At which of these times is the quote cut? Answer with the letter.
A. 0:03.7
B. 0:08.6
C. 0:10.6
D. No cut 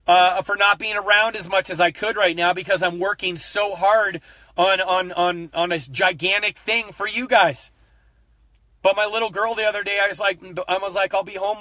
D